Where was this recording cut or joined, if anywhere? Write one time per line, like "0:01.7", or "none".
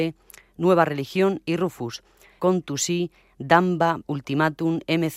0:02.4
0:04.0